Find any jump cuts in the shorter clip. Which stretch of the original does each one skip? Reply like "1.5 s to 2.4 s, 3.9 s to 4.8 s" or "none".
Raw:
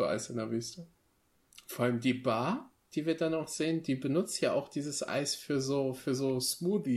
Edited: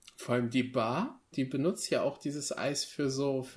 2.8 s to 3.8 s